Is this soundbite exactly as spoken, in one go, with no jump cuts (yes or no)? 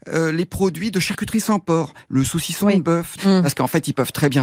no